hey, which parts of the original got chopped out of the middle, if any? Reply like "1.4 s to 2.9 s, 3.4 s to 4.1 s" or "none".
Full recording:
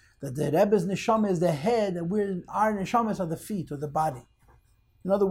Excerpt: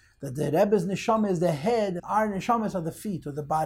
2.0 s to 2.4 s